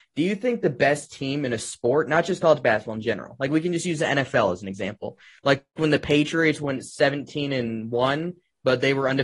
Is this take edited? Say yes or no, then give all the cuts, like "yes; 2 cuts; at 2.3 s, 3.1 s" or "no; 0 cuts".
no; 0 cuts